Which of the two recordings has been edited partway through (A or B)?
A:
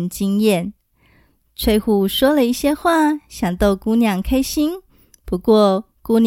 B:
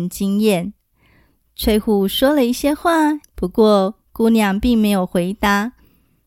B